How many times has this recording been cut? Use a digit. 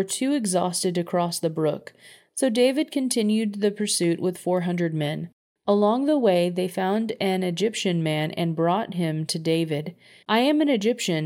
1